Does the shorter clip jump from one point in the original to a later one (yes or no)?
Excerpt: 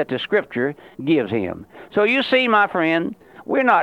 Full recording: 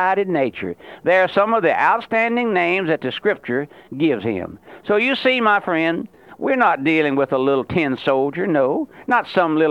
no